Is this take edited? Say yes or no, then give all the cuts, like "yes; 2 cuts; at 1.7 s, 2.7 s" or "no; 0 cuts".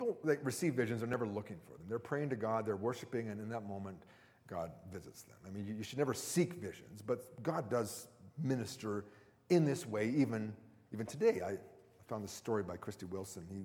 no; 0 cuts